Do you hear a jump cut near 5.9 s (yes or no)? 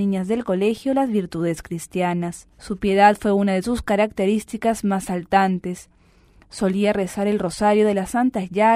no